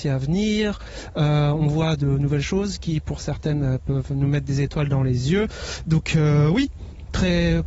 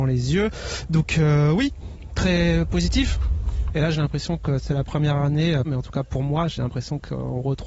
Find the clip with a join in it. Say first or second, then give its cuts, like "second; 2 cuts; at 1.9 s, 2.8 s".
second; 2 cuts; at 3.7 s, 5.6 s